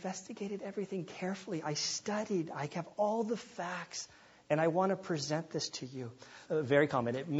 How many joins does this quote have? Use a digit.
1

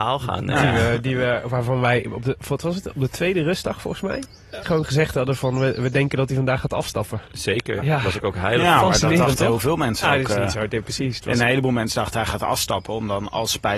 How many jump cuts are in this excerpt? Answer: 3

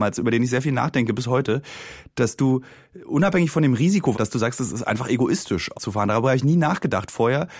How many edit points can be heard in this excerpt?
2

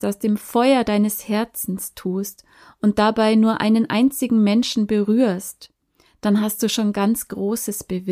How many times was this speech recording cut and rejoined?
0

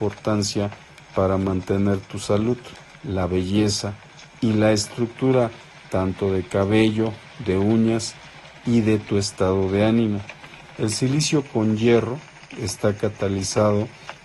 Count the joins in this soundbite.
2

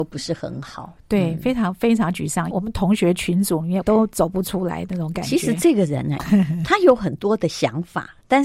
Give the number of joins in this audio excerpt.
3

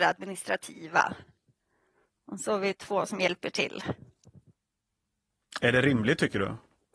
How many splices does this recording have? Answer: 0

